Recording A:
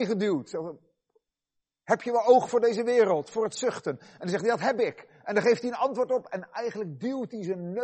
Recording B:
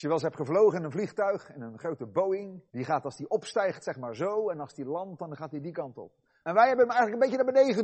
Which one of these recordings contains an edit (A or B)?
B